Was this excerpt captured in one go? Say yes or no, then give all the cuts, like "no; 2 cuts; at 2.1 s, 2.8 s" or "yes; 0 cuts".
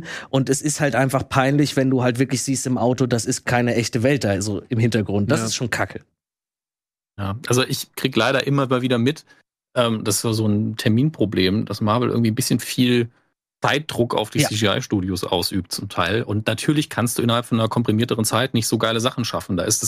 yes; 0 cuts